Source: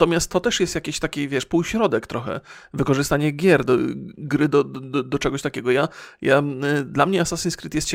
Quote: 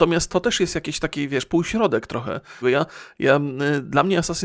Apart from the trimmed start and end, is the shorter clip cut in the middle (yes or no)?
yes